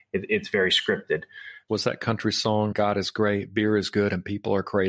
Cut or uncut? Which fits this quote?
cut